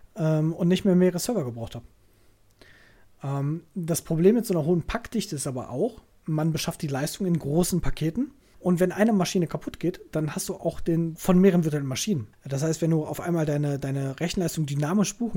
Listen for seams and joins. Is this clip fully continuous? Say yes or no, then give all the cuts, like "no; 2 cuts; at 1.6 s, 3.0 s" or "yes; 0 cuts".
no; 3 cuts; at 8.5 s, 11.2 s, 12.3 s